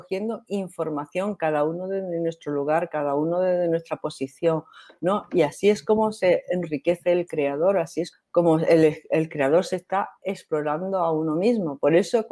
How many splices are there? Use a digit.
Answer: 1